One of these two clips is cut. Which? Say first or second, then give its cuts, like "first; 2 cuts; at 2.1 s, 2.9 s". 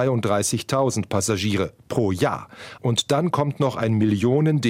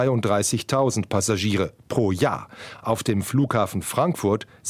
first; 1 cut; at 2.8 s